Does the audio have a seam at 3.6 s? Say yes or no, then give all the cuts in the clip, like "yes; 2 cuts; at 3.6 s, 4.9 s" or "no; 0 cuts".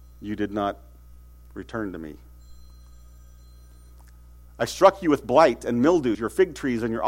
no; 1 cut; at 6.1 s